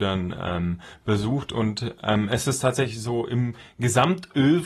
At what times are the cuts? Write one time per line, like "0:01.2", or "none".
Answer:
none